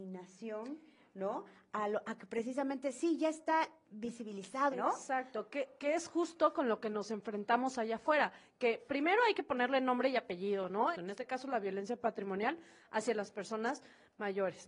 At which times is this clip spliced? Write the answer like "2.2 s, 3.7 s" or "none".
4.7 s, 10.9 s